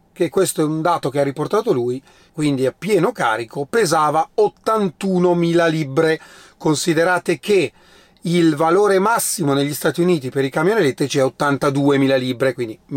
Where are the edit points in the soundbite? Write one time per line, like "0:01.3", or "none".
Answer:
0:02.3